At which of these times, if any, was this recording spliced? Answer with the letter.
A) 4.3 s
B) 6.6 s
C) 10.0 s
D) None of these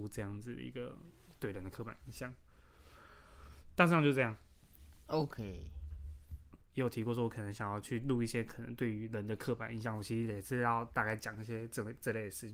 B